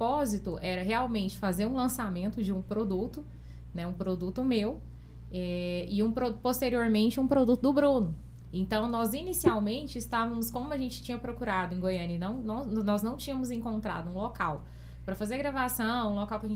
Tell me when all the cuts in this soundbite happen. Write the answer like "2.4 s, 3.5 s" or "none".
none